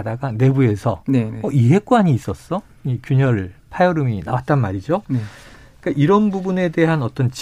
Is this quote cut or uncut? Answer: uncut